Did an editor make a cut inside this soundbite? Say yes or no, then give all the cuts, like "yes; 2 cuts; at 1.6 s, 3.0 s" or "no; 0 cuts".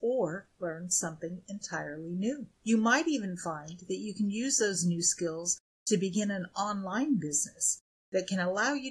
no; 0 cuts